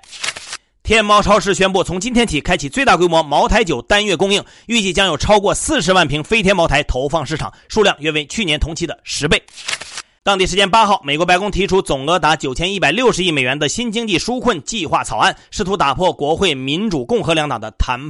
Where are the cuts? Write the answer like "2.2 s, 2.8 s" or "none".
10.2 s